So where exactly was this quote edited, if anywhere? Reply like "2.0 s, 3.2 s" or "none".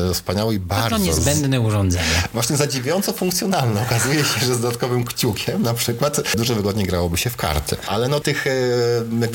8.2 s